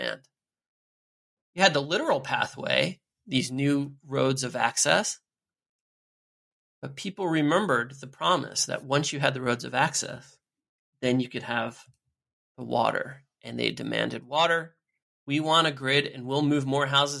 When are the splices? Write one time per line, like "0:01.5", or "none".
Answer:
0:15.0